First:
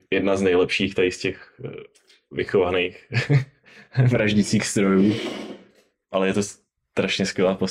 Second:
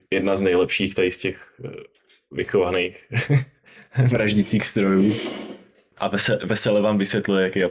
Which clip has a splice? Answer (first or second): second